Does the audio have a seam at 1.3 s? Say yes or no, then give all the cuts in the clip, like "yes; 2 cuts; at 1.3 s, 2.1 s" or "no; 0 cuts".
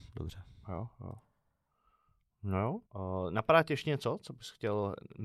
no; 1 cut; at 2.9 s